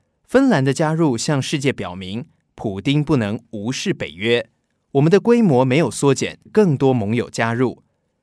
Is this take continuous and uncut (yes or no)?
no